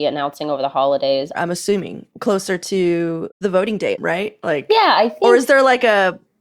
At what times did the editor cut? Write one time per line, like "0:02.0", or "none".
0:01.3